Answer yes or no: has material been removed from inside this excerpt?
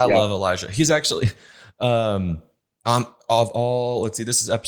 no